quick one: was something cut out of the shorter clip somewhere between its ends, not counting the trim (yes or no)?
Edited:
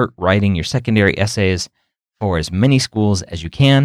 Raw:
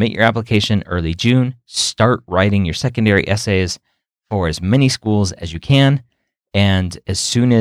no